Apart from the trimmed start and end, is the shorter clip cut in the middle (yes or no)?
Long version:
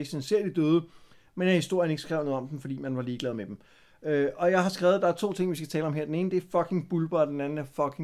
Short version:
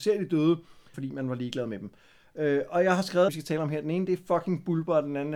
yes